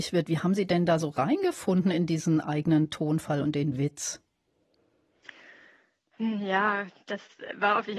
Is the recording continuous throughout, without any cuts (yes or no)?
yes